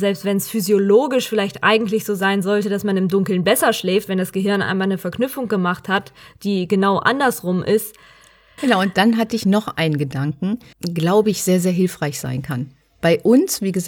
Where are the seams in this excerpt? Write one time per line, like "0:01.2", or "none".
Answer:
0:08.6
0:10.7